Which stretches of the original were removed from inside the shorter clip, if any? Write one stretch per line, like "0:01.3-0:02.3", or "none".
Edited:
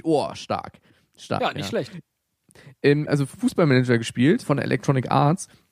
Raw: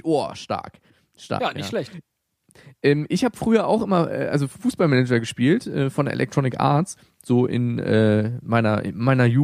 0:03.1-0:04.3
0:05.6-0:05.9